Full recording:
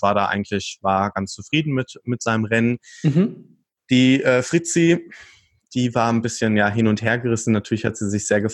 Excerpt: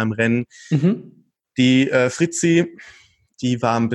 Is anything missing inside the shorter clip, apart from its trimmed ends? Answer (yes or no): no